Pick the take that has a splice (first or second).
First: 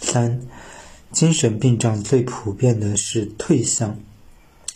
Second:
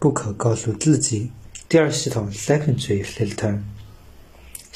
second